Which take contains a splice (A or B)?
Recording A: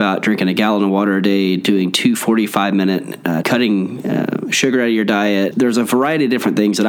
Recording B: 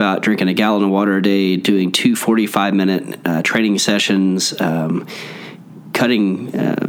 A